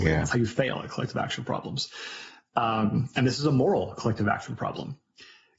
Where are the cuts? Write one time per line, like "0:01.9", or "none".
none